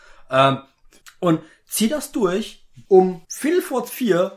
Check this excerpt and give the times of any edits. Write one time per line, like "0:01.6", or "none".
none